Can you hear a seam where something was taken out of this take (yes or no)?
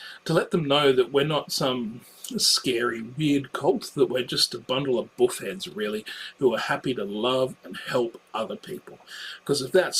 no